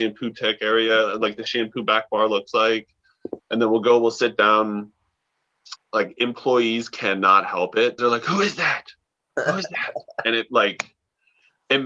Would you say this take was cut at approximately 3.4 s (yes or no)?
yes